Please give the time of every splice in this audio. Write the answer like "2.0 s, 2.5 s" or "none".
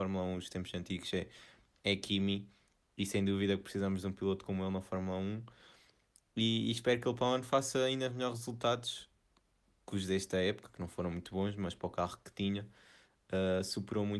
none